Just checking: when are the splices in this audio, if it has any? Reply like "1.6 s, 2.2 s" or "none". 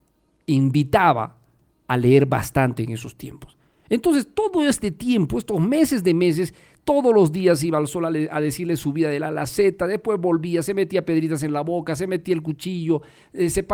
none